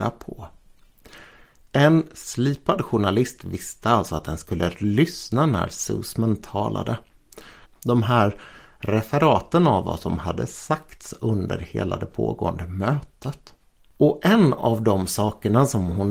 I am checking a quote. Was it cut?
yes; 1 cut; at 7.6 s

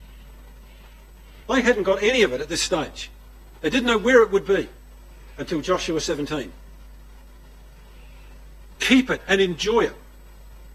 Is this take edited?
yes; 2 cuts; at 1.4 s, 8.7 s

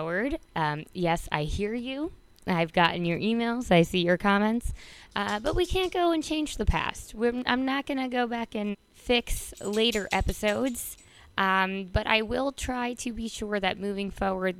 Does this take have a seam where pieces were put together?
yes; 1 cut; at 8.7 s

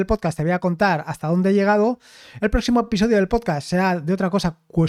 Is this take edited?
no; 0 cuts

